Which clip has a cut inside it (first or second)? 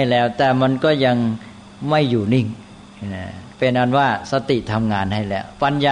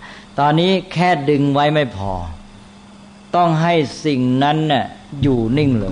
first